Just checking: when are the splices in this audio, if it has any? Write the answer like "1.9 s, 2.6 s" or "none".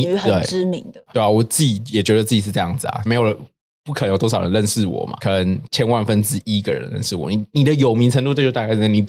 1.1 s, 3.1 s